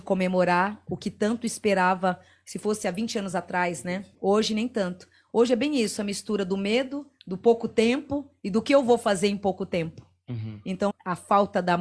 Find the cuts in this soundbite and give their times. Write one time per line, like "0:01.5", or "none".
0:04.1
0:10.9